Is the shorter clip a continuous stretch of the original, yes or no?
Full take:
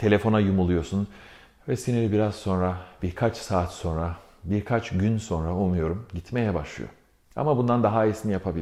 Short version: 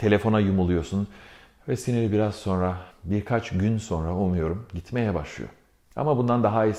no